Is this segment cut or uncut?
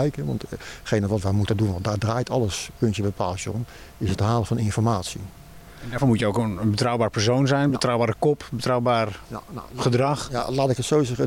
uncut